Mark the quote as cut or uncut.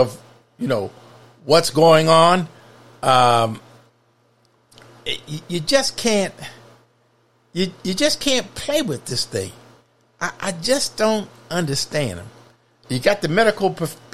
uncut